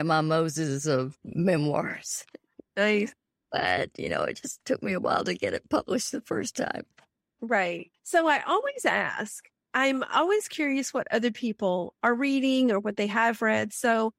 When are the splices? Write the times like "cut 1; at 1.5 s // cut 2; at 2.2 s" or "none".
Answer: none